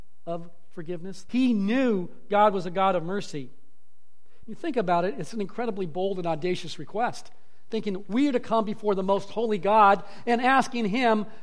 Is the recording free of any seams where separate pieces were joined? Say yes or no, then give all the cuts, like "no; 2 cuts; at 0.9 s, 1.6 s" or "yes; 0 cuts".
no; 2 cuts; at 1.3 s, 4.4 s